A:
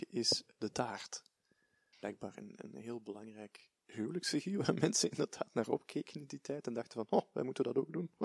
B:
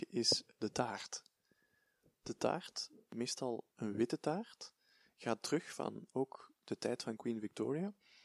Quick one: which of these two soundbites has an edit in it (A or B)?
A